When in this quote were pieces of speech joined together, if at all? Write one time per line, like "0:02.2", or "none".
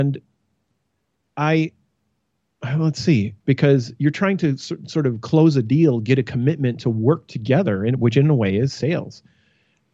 0:03.4

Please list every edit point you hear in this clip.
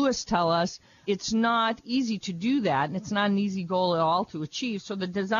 0:01.0

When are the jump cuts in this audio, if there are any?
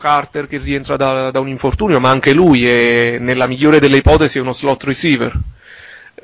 none

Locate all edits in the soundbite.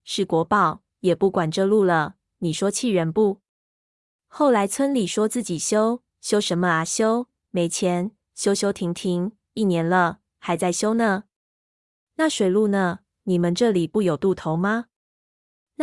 0:00.9

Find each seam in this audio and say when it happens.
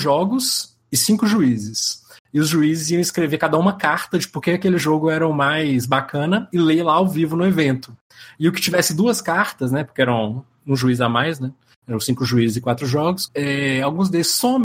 0:13.3

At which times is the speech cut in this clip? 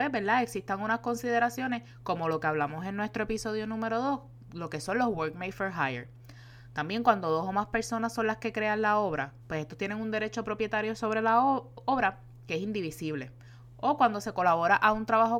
0:09.4

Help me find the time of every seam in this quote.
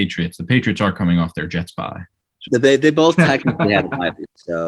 0:02.5

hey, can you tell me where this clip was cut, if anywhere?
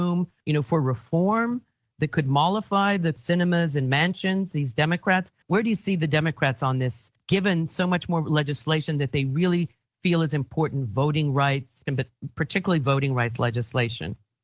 0:11.9

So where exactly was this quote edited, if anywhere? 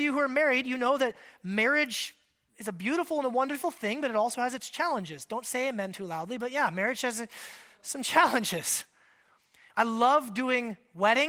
none

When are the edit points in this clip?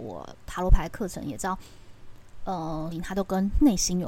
0:02.9

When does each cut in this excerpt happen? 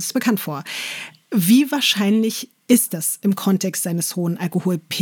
none

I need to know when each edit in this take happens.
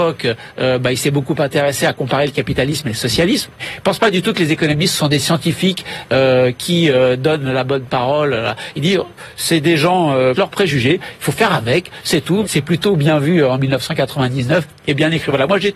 0:03.6
0:10.3
0:12.4

